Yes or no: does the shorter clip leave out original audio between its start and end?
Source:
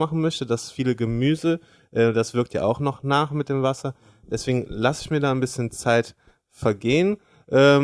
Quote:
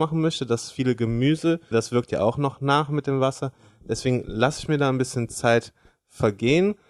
yes